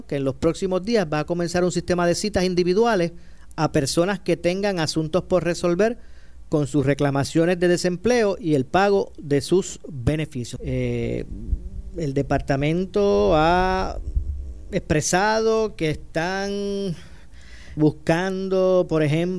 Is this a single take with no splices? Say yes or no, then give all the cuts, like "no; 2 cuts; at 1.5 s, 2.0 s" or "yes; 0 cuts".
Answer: no; 2 cuts; at 10.6 s, 17.8 s